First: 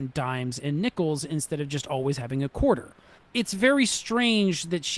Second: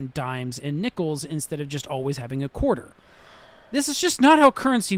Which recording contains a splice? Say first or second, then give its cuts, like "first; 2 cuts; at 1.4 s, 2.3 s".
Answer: first; 1 cut; at 3.2 s